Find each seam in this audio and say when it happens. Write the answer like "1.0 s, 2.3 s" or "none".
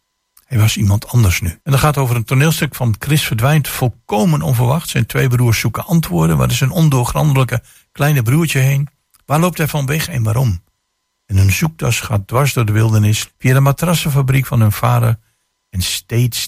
1.6 s, 13.3 s